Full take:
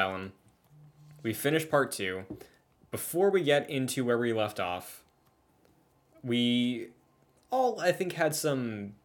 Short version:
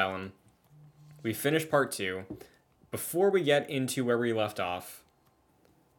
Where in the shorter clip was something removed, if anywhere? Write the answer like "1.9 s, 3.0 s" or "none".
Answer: none